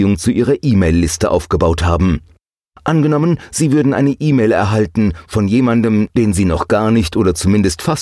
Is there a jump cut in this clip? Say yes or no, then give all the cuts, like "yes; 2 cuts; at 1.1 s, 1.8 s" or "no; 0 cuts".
no; 0 cuts